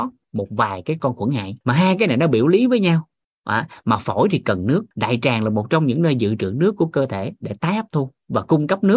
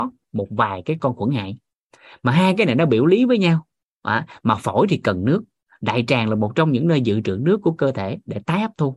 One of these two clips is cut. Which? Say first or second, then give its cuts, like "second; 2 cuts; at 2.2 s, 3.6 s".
first; 2 cuts; at 1.6 s, 4.9 s